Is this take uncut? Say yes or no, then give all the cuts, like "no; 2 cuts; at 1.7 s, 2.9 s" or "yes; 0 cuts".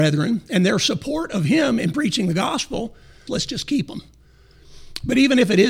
no; 1 cut; at 3.3 s